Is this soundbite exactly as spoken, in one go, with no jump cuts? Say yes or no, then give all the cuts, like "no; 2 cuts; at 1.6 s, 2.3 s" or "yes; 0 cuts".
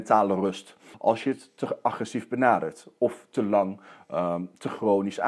no; 1 cut; at 0.9 s